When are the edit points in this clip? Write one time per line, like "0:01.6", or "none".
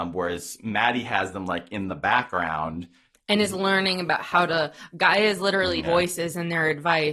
0:05.8